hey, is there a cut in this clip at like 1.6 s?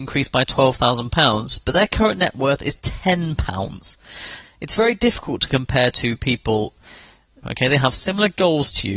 no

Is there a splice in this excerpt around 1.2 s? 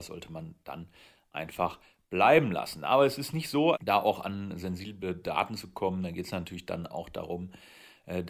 no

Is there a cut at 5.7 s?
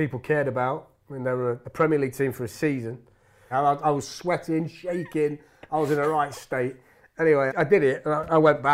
no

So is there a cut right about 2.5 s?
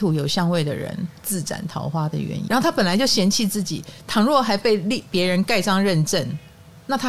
yes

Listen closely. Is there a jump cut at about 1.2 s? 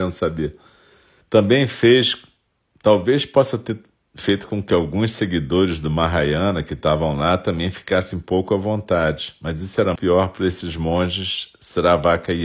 yes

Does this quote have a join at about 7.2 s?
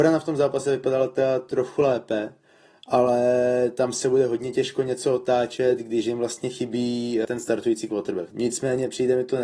yes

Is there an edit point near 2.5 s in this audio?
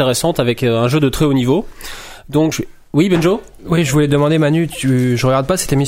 yes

